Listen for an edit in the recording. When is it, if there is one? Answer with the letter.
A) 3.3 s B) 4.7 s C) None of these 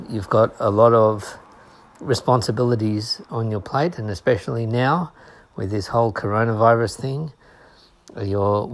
A